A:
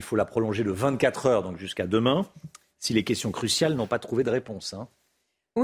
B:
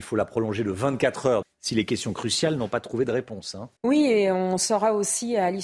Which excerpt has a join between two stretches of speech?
B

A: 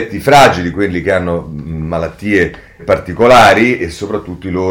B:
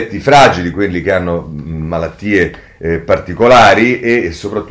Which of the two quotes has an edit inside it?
A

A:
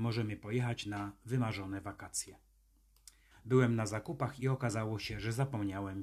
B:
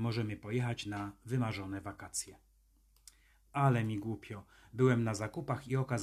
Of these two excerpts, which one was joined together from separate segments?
A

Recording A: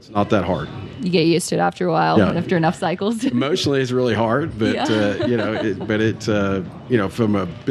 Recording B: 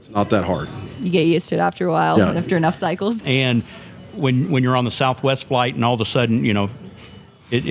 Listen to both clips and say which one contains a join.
B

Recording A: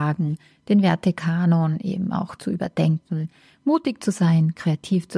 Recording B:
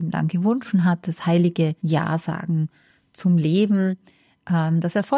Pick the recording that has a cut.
B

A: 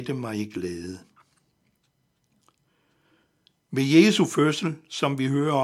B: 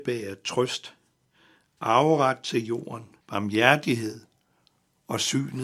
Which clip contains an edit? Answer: B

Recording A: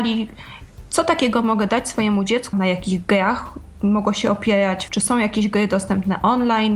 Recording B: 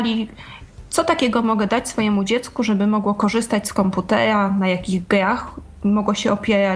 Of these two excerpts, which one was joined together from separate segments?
A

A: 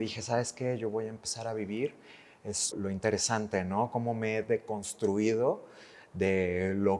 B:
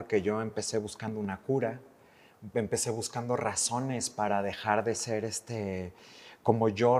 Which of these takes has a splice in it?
A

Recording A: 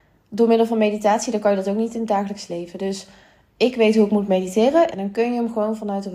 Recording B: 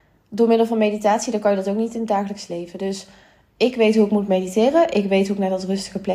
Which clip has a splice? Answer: A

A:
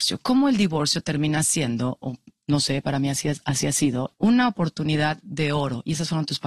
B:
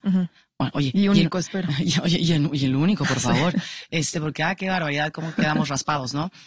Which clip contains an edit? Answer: A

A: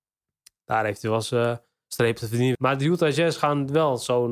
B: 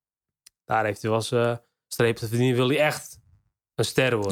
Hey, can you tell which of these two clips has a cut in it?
A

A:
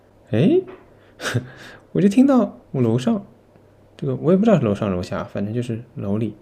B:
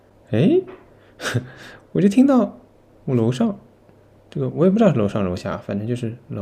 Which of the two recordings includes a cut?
A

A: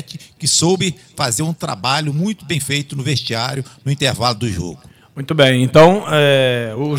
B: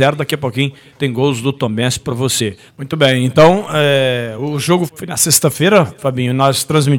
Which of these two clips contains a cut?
B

